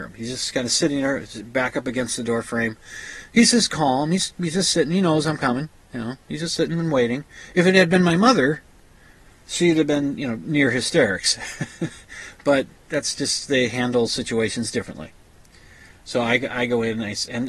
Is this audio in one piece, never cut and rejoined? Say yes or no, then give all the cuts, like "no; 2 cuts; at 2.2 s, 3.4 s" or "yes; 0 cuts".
yes; 0 cuts